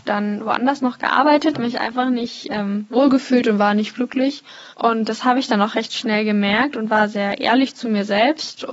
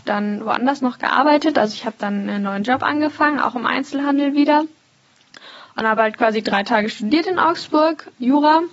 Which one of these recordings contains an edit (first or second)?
first